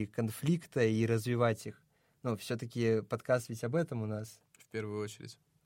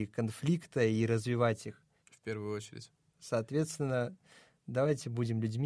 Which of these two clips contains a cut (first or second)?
second